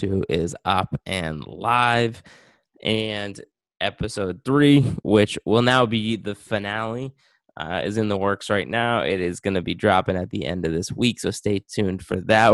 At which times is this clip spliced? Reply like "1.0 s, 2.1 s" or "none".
none